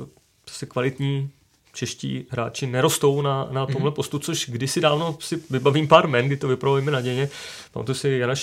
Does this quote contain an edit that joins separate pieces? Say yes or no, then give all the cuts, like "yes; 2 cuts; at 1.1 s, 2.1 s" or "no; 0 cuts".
no; 0 cuts